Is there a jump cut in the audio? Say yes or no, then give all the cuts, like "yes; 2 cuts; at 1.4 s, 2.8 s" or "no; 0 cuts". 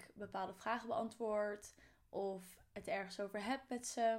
no; 0 cuts